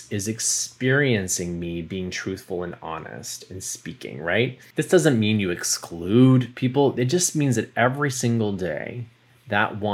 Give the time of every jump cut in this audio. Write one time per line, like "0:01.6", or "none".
none